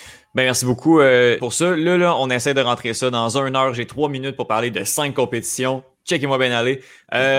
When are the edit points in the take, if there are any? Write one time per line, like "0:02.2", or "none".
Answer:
0:01.4